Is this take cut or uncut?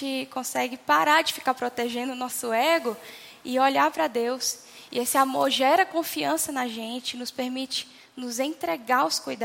uncut